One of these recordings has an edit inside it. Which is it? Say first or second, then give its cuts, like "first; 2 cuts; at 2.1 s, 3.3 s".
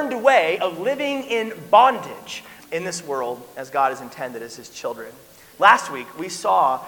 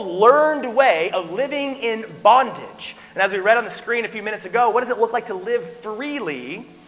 first; 2 cuts; at 2.6 s, 5.5 s